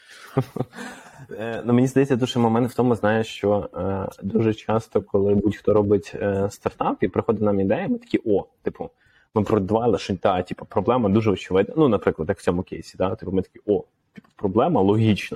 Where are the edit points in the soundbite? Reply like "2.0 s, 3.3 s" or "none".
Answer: none